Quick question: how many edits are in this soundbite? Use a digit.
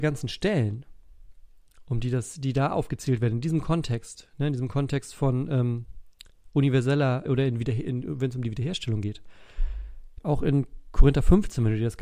2